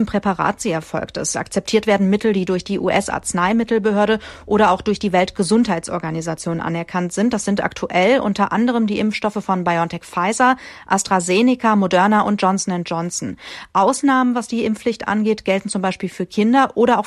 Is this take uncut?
yes; 0 cuts

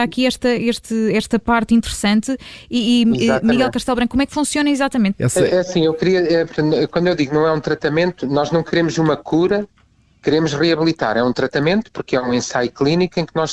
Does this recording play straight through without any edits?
no; 1 cut; at 5.1 s

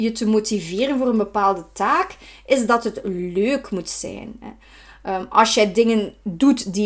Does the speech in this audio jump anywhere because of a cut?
no; 0 cuts

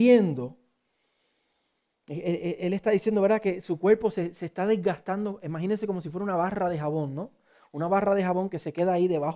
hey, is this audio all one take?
yes; 0 cuts

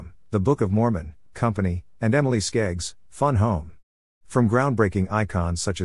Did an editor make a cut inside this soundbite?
yes; 1 cut; at 1.3 s

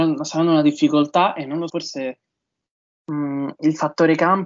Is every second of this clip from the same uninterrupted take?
no; 1 cut; at 1.7 s

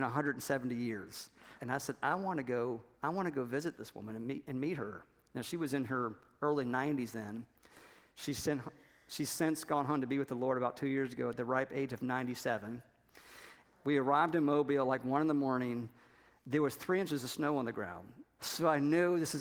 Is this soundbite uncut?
no; 3 cuts; at 1.6 s, 13.6 s, 18.4 s

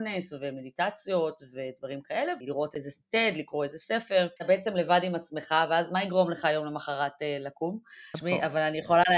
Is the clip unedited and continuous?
no; 3 cuts; at 2.4 s, 4.4 s, 8.1 s

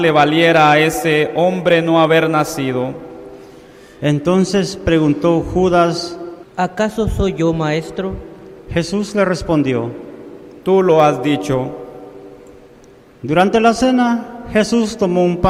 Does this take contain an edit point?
yes; 1 cut; at 6.4 s

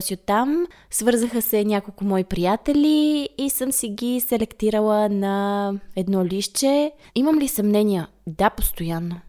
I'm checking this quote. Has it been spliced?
yes; 1 cut; at 7.1 s

